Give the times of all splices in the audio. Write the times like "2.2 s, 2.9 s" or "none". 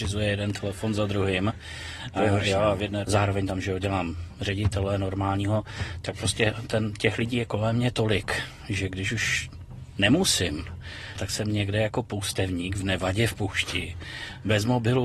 3.0 s, 11.2 s